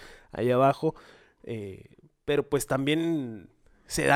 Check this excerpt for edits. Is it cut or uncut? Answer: uncut